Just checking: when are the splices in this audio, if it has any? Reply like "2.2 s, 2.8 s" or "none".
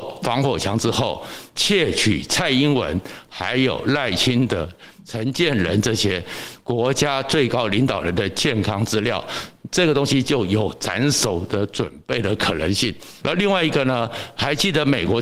13.2 s